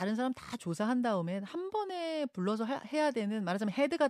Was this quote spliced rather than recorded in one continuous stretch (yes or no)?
no